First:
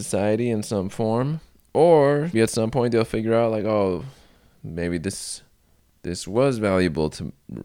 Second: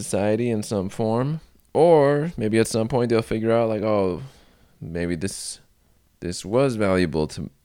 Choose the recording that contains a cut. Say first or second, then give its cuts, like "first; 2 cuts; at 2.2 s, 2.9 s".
first; 1 cut; at 2.3 s